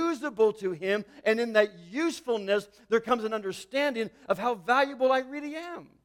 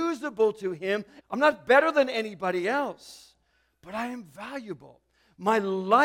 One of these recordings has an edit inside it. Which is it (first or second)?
second